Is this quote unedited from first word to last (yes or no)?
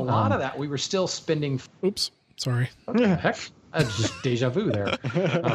yes